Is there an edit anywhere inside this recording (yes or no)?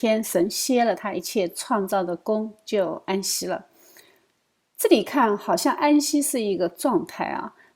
no